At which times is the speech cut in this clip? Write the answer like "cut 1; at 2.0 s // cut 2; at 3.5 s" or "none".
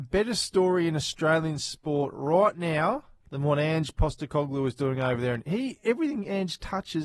none